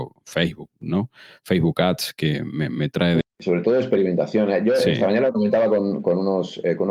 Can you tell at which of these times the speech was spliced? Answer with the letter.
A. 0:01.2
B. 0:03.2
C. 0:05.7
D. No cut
B